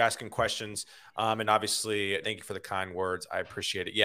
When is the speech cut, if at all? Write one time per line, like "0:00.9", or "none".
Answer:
0:02.2

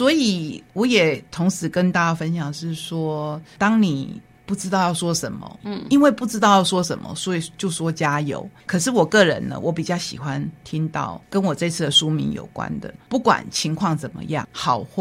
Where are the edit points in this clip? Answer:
0:05.6
0:08.7
0:13.0

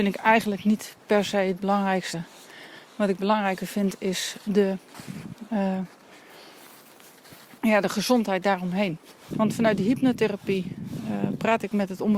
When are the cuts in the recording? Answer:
0:07.6
0:09.3

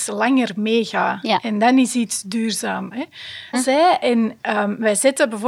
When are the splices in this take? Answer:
0:03.5

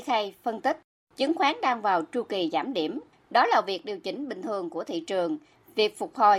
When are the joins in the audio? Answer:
none

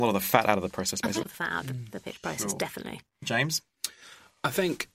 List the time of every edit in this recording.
0:01.2

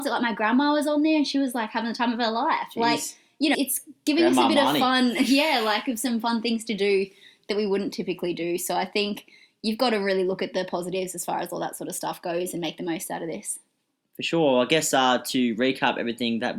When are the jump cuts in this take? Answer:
0:03.5

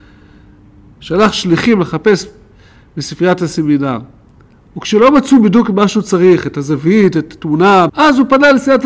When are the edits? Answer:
0:07.9

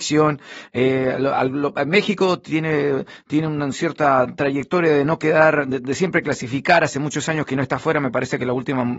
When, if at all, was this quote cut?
none

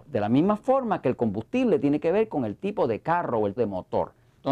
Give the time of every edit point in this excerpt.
0:03.6

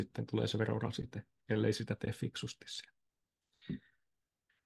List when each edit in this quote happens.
none

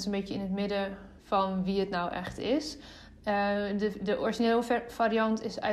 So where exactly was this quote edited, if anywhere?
0:01.2

